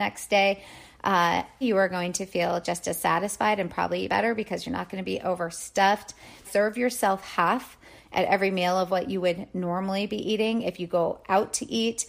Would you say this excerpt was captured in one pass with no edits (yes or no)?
no